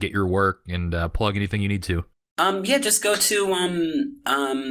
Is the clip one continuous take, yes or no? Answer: yes